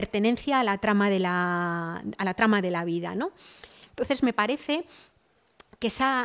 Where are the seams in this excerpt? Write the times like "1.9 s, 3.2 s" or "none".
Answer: 3.8 s